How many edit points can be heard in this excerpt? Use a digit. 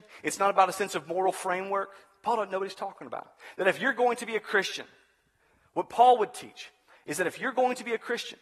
0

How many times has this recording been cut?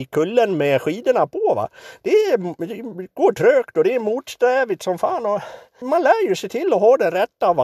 1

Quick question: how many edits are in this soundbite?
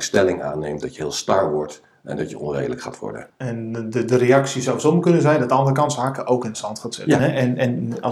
2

